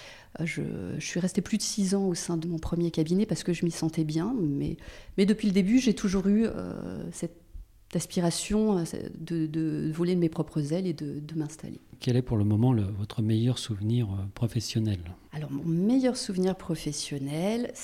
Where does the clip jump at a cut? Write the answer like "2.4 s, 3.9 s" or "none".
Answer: 2.4 s